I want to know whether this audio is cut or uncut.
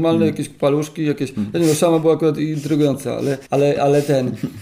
cut